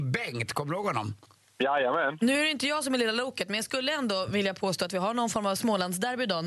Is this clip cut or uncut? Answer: cut